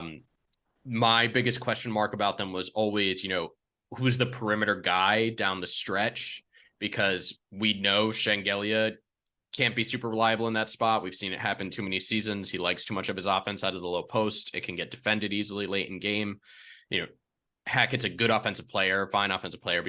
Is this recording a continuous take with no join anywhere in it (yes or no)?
yes